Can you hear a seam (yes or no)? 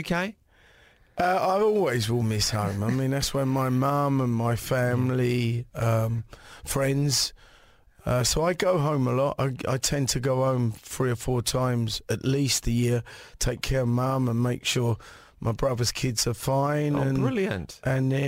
no